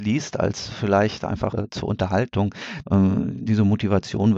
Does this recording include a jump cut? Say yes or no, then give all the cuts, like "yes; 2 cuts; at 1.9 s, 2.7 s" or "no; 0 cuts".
yes; 2 cuts; at 1.5 s, 2.8 s